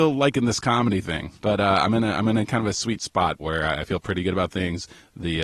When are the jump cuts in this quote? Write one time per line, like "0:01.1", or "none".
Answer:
0:01.4
0:03.4